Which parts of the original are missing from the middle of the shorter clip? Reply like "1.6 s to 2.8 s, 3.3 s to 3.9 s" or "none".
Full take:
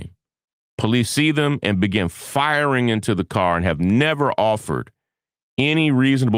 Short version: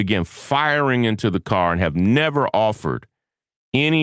none